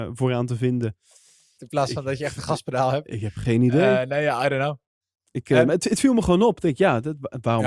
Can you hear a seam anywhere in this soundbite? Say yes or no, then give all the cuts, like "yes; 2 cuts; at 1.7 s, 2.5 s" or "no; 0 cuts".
yes; 1 cut; at 1.6 s